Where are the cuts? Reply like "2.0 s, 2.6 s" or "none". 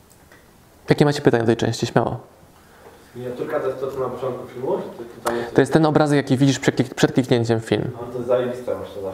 none